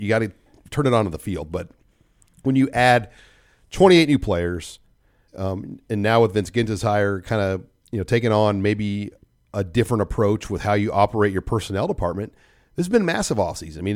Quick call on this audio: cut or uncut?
cut